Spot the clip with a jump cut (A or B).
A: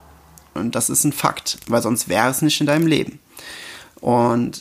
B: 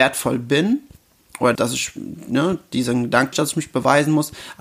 B